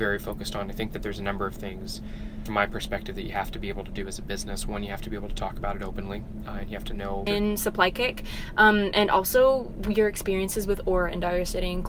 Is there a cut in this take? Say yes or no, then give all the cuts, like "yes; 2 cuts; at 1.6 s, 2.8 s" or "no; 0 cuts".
yes; 2 cuts; at 2.5 s, 7.3 s